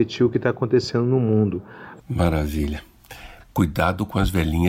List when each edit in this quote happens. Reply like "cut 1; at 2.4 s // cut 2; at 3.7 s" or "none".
cut 1; at 2.0 s // cut 2; at 3.4 s